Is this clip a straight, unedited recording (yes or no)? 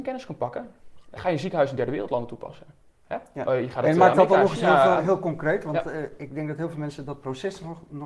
yes